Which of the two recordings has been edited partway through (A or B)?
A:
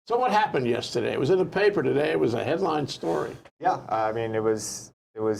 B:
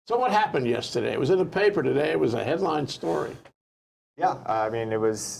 A